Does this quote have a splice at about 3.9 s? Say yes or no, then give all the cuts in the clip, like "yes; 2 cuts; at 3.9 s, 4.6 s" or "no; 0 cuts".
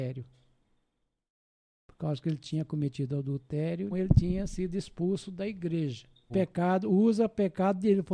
yes; 2 cuts; at 3.9 s, 6.3 s